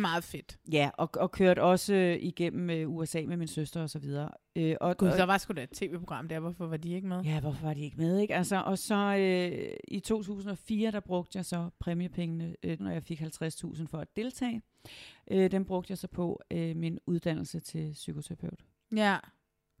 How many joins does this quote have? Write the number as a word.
one